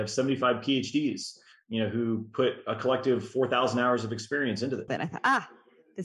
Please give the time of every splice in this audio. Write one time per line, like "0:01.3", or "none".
0:04.9

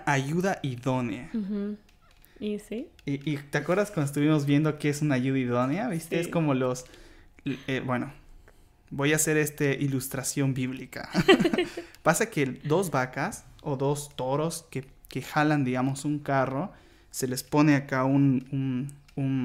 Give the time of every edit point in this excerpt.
none

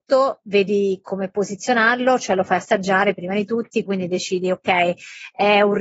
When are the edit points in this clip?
0:03.9

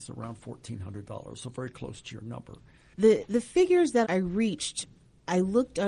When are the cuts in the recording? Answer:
0:02.9
0:04.0

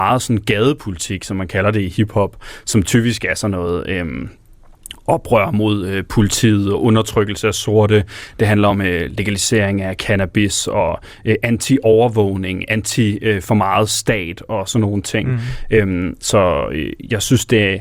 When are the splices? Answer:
none

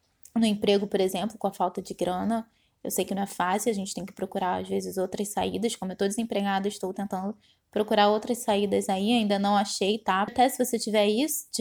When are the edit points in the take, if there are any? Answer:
0:10.3

